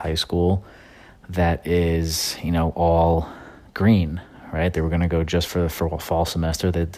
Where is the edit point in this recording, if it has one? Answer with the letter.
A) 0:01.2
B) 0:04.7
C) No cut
B